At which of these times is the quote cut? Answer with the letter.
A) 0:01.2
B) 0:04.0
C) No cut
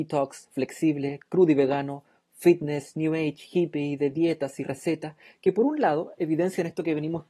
C